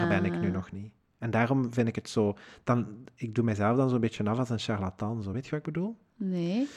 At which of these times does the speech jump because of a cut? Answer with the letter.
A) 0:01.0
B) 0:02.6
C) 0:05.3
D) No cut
D